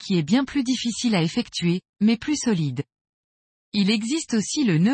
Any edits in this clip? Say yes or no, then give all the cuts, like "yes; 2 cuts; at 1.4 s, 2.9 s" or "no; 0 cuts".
no; 0 cuts